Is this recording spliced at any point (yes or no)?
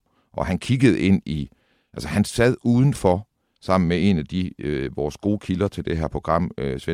no